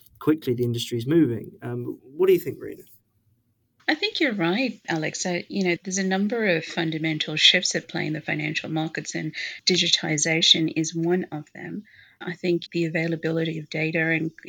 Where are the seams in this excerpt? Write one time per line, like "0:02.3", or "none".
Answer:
none